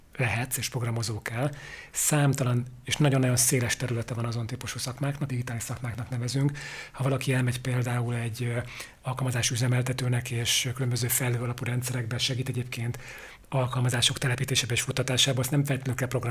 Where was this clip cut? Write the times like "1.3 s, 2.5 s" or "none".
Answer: 5.3 s